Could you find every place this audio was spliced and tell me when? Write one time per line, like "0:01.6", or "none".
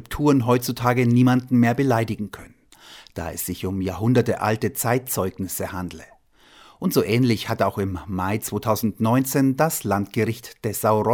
none